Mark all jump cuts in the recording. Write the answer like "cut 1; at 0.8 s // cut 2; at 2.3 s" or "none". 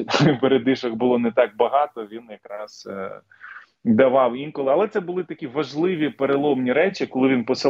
none